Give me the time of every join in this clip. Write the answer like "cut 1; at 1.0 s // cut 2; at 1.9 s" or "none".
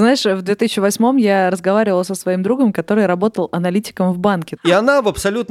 cut 1; at 4.6 s